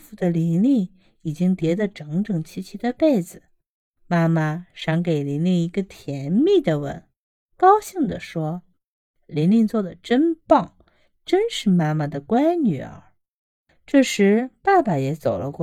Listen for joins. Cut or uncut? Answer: uncut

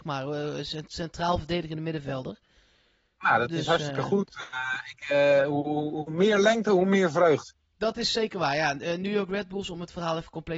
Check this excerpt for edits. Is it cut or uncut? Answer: uncut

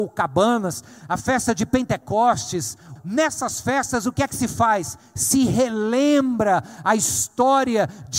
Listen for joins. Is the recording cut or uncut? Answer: cut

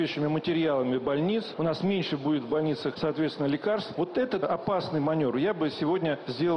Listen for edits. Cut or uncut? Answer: uncut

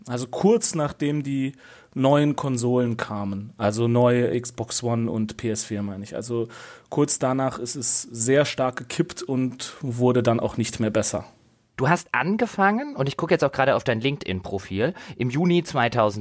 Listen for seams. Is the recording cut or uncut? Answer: cut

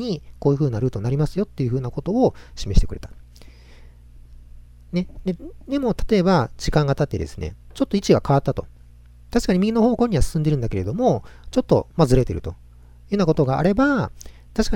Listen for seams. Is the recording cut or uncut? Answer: uncut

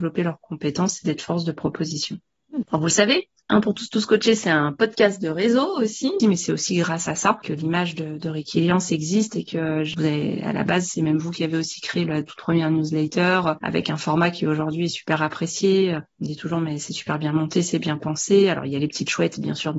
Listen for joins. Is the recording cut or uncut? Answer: cut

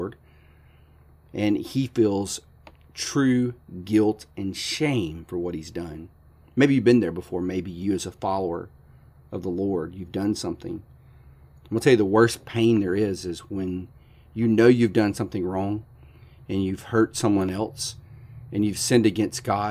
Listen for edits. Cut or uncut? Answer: uncut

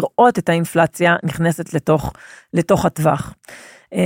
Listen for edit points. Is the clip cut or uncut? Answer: uncut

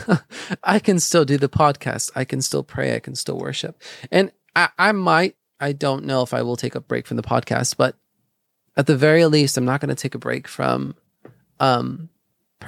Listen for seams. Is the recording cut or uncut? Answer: uncut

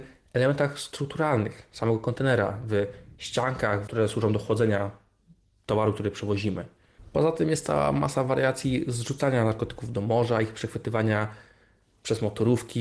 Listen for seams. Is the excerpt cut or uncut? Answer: cut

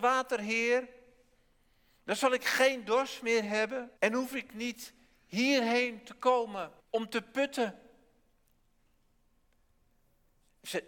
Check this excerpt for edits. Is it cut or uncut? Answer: cut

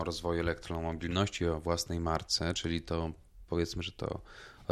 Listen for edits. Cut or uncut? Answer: uncut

